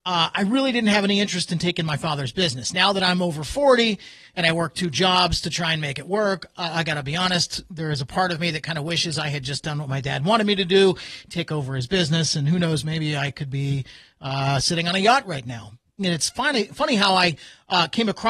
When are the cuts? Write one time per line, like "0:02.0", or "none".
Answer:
0:16.0